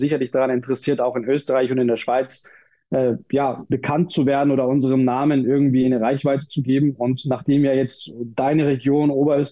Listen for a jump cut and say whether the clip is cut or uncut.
uncut